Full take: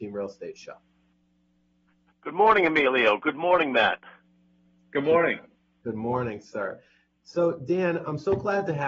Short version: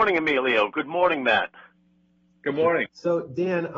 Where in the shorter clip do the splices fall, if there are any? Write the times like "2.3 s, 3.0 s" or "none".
2.9 s

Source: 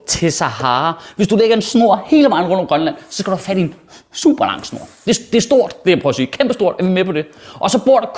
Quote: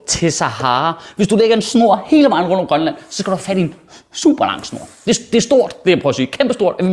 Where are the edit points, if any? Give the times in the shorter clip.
none

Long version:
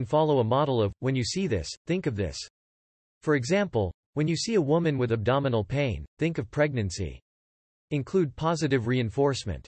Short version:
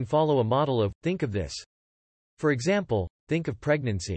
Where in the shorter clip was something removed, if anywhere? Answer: 1.0 s, 3.2 s

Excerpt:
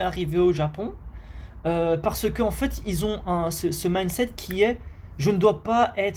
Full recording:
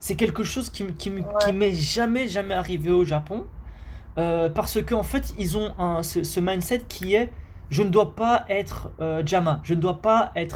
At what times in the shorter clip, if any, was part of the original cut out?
none

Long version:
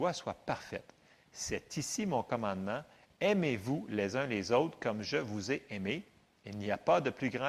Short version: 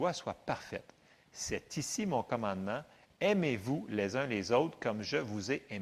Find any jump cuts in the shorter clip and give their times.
none

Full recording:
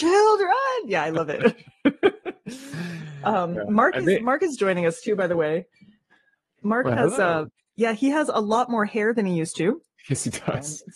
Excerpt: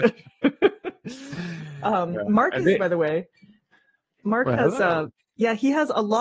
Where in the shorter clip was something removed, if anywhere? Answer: 2.8 s

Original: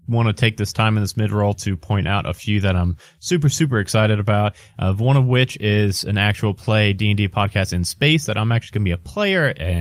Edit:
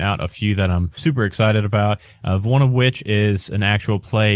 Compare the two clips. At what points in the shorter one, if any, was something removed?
1.0 s

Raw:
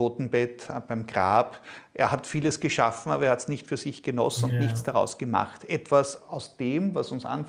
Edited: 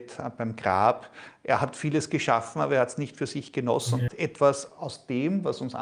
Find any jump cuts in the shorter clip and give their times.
4.1 s

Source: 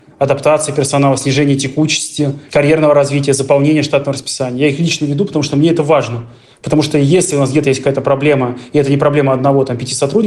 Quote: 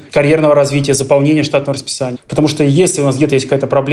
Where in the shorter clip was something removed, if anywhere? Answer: 2.1 s

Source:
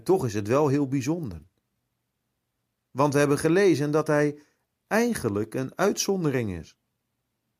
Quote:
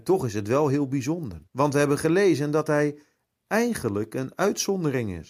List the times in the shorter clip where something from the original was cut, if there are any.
1.5 s

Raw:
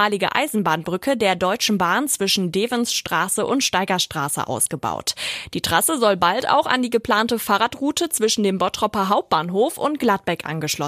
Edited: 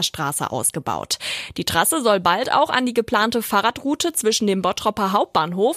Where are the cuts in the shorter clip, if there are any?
none

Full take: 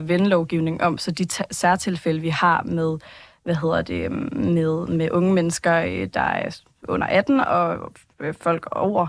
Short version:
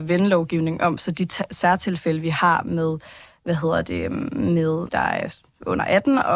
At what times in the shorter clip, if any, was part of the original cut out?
4.9 s

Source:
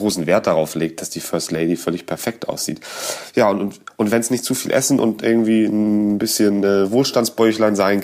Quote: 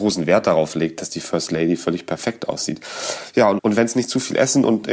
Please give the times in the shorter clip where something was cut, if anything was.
3.6 s

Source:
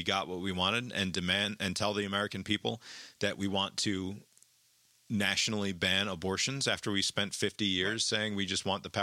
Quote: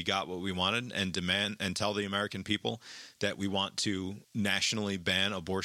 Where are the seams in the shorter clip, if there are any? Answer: 4.2 s

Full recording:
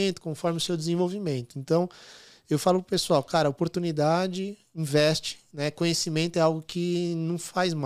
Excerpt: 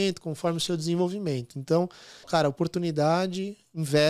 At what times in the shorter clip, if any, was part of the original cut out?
2.2 s

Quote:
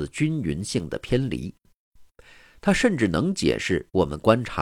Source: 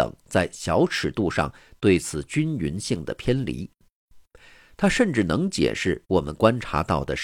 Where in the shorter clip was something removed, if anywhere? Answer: none

